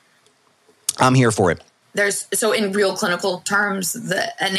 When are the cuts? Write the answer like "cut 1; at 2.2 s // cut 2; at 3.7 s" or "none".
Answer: cut 1; at 1.8 s